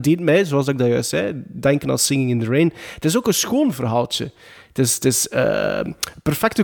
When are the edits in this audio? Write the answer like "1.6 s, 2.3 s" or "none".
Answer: none

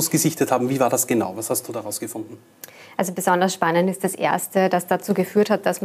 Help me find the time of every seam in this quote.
none

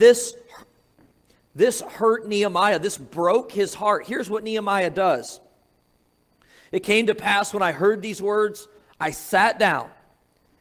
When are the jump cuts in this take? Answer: none

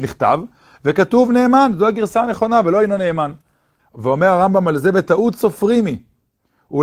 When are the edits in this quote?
3.8 s

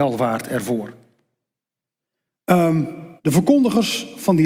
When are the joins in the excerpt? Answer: 3.2 s

